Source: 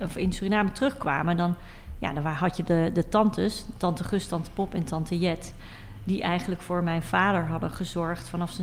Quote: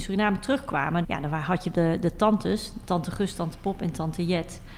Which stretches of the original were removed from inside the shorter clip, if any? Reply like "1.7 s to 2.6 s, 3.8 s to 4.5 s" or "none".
1.4 s to 2.0 s